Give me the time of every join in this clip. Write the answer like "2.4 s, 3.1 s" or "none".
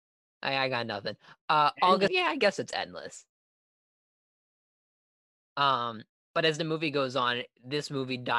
2.1 s, 5.4 s